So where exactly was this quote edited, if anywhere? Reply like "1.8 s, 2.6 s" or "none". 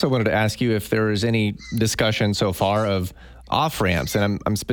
none